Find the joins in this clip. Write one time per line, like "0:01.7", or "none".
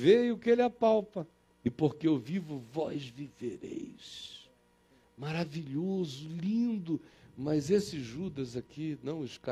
0:01.5

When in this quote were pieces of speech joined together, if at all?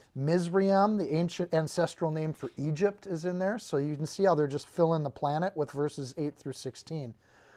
none

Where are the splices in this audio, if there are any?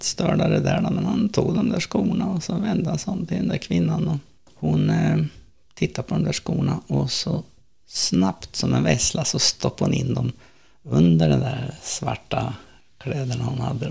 none

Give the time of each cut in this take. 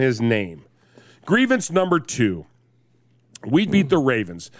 0:03.7

